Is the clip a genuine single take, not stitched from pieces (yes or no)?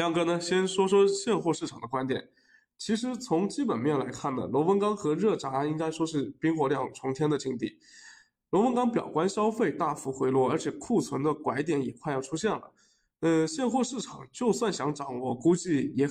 yes